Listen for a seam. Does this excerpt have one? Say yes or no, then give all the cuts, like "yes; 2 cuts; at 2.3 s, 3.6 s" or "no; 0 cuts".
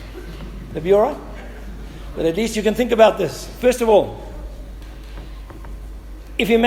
no; 0 cuts